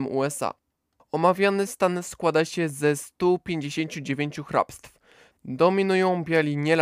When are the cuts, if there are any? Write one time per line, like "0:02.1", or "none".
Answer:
0:05.3